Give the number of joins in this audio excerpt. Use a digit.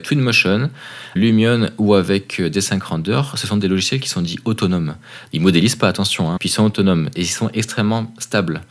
3